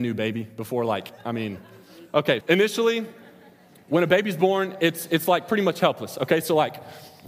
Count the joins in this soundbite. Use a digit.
1